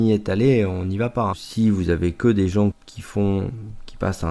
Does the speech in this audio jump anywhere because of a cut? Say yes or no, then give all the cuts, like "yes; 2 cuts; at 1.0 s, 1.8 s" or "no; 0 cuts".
yes; 2 cuts; at 1.3 s, 2.7 s